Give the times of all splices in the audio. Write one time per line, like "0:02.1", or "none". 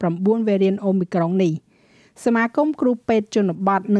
none